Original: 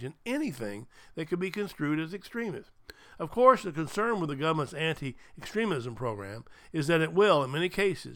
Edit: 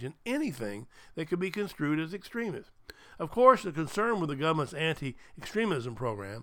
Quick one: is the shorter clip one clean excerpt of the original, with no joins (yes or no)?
yes